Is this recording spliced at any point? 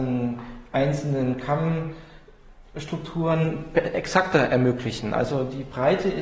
no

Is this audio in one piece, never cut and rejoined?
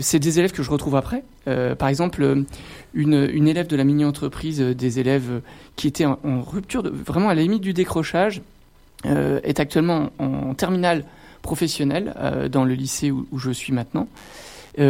yes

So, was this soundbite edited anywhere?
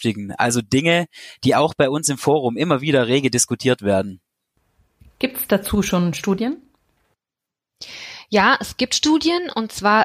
no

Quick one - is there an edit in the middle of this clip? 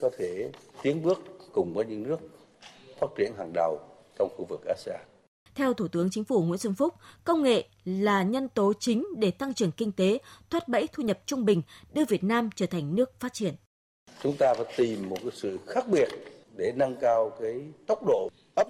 yes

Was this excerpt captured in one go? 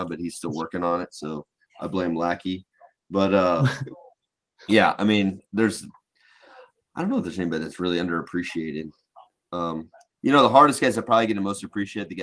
yes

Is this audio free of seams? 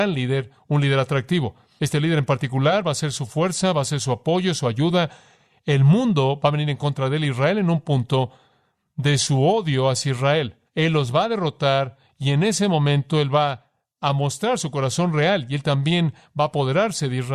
no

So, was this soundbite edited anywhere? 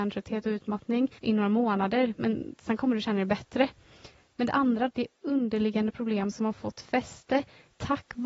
yes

